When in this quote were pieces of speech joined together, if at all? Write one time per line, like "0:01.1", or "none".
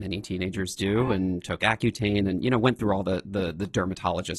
none